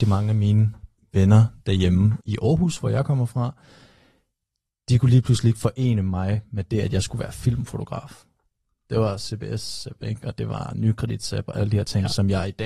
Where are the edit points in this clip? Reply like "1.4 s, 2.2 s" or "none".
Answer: none